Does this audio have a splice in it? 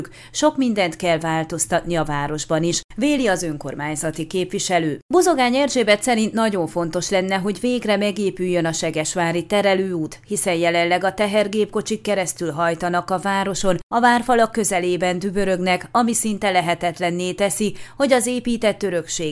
no; 0 cuts

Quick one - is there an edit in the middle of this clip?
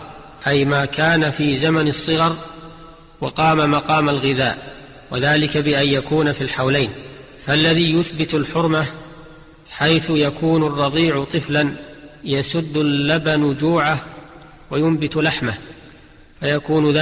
no; 0 cuts

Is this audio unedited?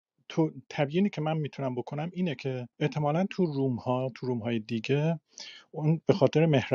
no; 1 cut; at 2.7 s

